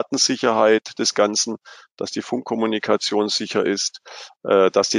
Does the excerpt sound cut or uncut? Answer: uncut